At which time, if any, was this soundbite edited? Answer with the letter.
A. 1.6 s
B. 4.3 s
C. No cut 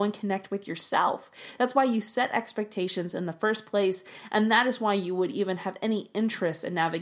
C